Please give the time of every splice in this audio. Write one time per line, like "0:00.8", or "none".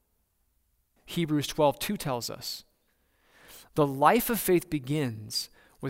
0:01.0